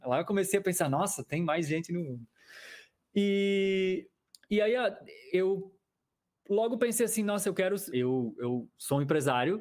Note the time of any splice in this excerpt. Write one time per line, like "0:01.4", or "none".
0:07.9